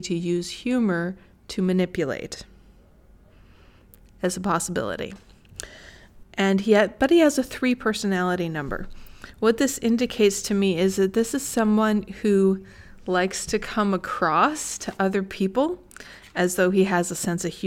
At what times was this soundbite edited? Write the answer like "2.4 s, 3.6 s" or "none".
6.2 s